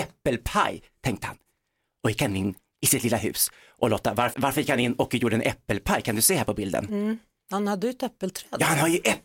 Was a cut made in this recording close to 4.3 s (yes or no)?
yes